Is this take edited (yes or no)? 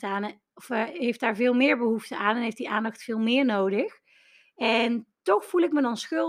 no